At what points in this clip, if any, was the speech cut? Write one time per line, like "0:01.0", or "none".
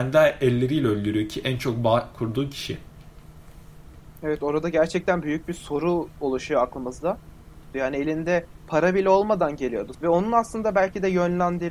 0:07.7
0:09.9